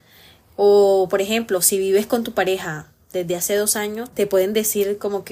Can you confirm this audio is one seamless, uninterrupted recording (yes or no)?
no